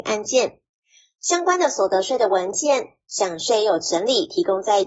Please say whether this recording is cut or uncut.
uncut